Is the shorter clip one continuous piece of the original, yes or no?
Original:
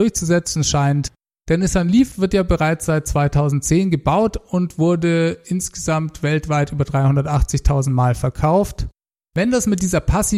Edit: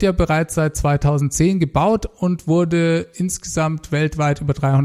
yes